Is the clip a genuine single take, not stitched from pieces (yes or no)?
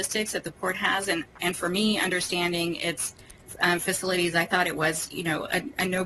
yes